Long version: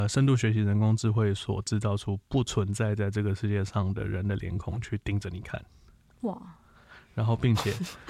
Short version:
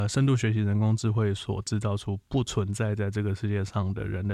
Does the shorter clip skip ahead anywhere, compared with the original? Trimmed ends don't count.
no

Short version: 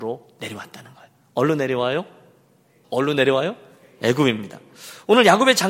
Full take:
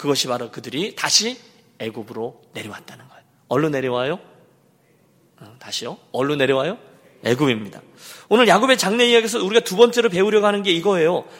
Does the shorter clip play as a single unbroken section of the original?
no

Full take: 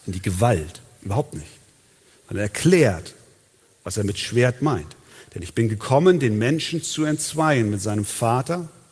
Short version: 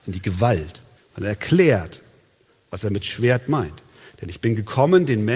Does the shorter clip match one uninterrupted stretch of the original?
no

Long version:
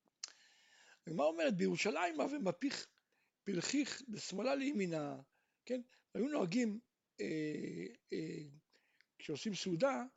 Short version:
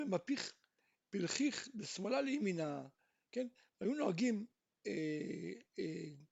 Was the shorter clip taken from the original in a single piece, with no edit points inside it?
yes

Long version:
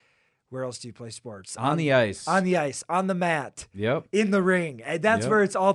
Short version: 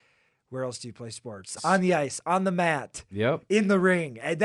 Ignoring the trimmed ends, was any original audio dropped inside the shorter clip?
yes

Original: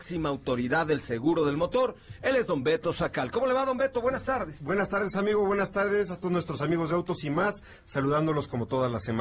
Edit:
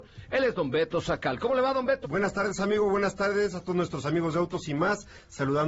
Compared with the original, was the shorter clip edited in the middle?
yes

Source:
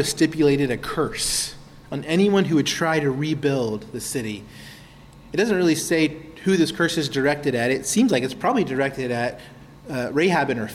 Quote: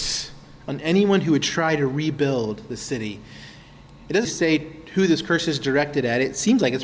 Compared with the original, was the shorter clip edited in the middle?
yes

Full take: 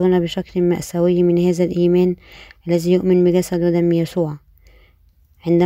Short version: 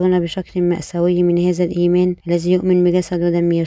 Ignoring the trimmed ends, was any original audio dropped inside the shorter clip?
yes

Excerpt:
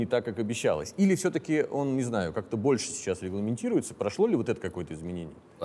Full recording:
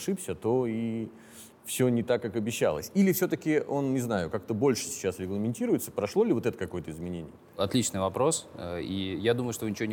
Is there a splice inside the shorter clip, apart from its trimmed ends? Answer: no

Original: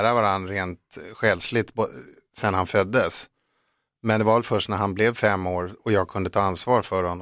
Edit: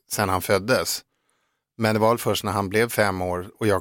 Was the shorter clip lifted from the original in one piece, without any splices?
yes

